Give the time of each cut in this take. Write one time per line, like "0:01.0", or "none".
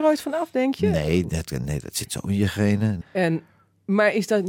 0:03.0